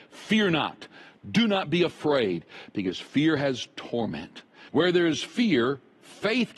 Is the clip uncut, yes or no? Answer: no